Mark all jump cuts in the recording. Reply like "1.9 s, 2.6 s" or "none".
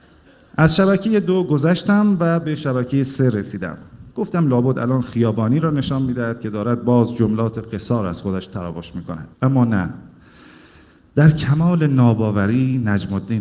9.3 s

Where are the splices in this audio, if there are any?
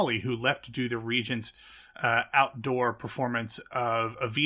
none

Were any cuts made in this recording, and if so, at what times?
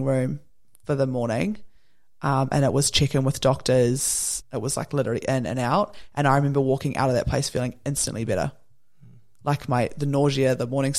4.4 s

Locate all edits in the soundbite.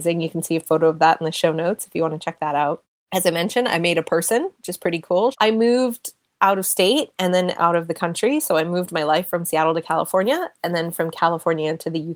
5.3 s

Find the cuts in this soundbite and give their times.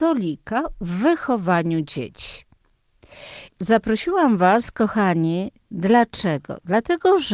3.5 s

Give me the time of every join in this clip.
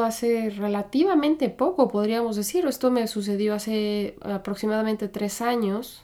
none

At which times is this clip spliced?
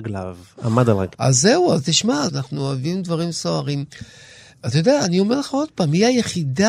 1.1 s, 2.3 s

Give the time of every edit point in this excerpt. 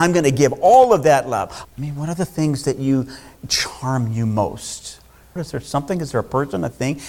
1.6 s, 5.4 s

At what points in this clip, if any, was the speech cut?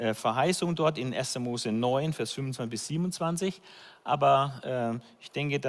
none

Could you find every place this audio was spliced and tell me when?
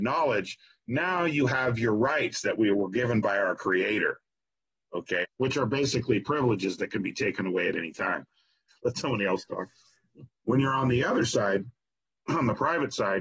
5.2 s, 8.7 s, 10.3 s

